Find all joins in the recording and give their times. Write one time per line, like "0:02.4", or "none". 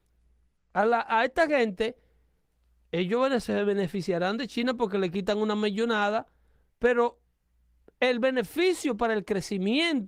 none